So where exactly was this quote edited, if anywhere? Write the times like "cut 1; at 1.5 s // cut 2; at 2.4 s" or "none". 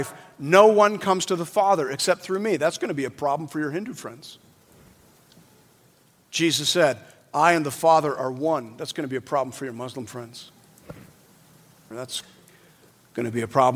cut 1; at 11.9 s

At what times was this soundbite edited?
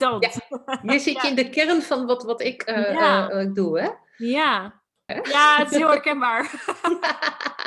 cut 1; at 5.1 s

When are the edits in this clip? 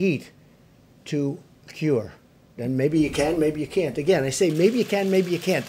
cut 1; at 2.6 s

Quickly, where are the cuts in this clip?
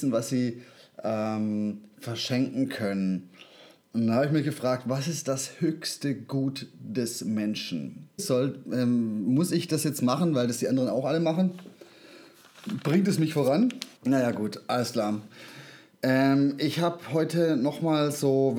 cut 1; at 8.2 s // cut 2; at 14.0 s // cut 3; at 15.3 s

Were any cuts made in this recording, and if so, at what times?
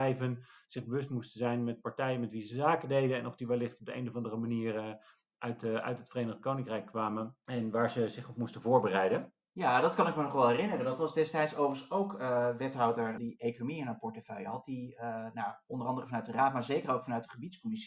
cut 1; at 13.2 s

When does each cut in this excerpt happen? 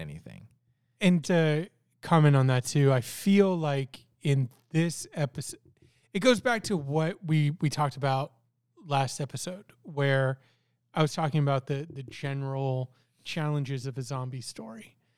cut 1; at 1.2 s

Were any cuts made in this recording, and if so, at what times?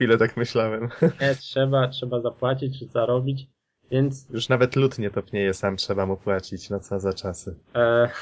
none

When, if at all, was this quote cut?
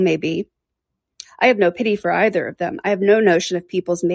cut 1; at 1.2 s

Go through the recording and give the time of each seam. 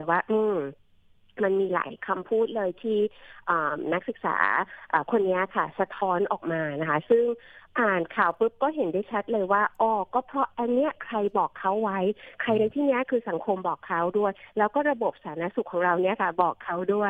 none

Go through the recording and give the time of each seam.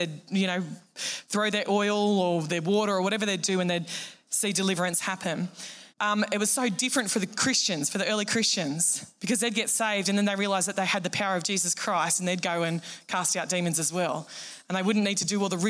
cut 1; at 5.9 s

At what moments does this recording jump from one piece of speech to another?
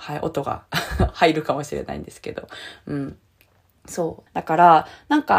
cut 1; at 4.3 s

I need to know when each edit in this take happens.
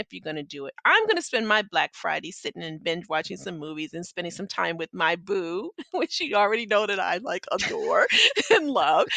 none

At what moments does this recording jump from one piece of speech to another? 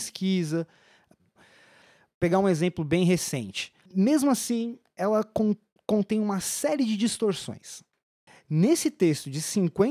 cut 1; at 1.4 s // cut 2; at 3.9 s

